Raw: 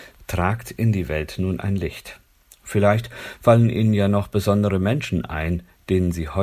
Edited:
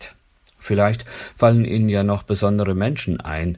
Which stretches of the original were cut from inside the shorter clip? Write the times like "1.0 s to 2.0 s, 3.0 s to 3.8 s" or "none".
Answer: none